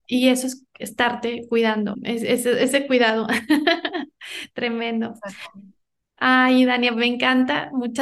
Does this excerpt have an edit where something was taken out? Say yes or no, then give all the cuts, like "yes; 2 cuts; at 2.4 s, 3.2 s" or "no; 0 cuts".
yes; 1 cut; at 1.9 s